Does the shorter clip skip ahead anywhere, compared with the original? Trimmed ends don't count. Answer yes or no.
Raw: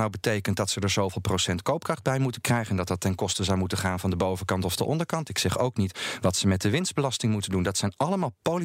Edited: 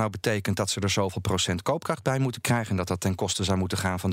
no